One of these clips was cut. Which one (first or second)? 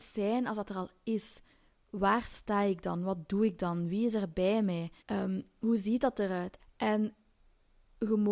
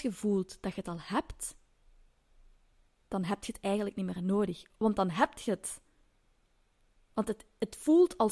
first